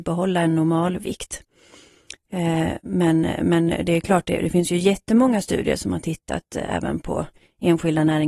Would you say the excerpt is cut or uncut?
uncut